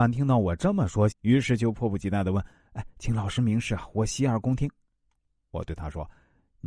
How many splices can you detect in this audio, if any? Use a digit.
1